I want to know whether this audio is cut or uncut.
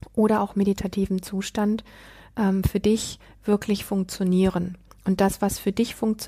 uncut